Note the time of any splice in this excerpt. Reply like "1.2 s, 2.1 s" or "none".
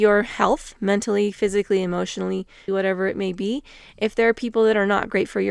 2.7 s